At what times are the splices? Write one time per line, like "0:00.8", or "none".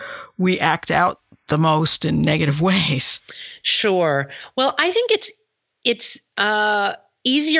none